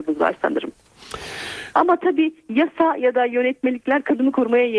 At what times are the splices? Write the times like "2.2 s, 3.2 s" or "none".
1.7 s